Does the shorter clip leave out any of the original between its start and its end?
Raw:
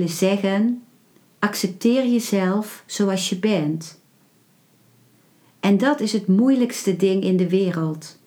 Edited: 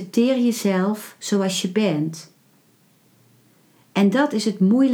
no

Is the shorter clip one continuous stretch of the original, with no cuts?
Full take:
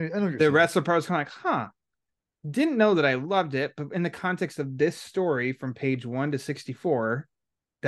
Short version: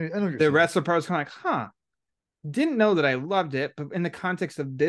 yes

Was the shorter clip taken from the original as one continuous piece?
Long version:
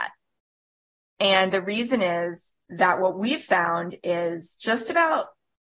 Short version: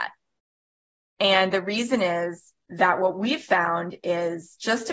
yes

